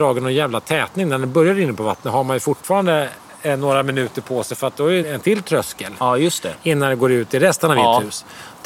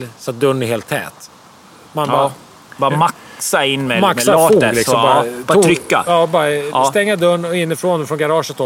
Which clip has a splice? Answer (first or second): first